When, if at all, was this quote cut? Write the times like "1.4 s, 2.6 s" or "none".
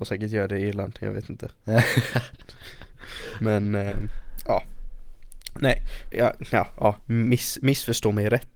6.1 s